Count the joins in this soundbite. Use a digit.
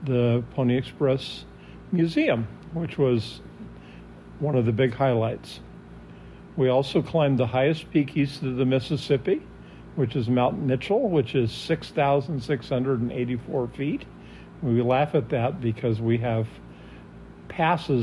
0